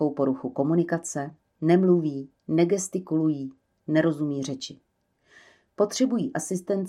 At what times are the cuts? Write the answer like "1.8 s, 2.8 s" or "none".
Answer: none

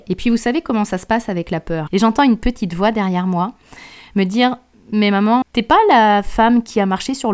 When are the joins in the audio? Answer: 1.9 s, 5.4 s

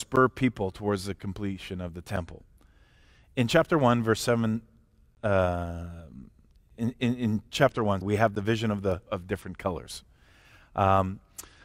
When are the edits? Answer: 6.7 s, 8.0 s, 9.1 s

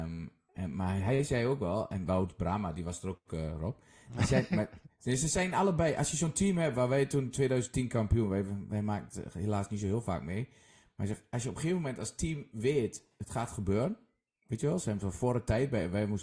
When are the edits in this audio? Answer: none

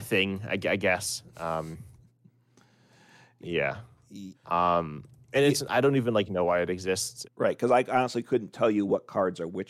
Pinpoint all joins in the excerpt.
4.3 s, 7.2 s

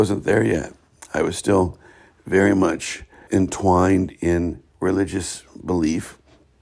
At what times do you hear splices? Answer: 3.3 s, 4.7 s

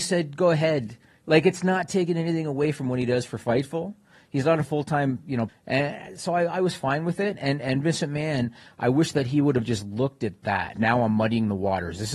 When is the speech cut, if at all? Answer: 5.5 s, 10.7 s

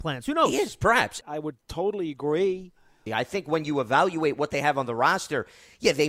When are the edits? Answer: 1.2 s, 3.1 s

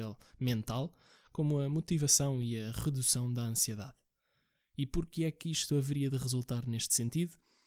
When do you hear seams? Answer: none

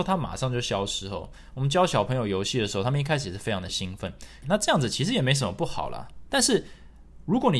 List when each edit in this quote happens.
4.4 s, 6.3 s

